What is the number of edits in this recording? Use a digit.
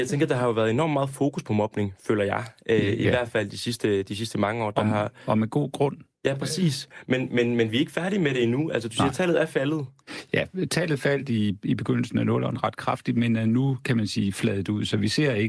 0